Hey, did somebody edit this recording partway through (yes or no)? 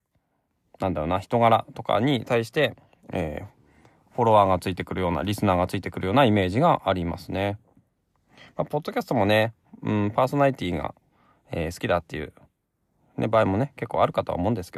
no